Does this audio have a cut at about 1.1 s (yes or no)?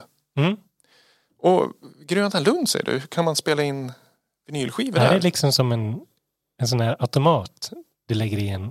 no